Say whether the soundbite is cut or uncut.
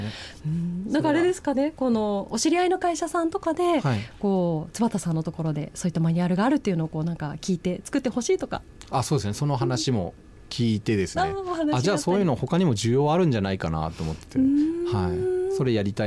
uncut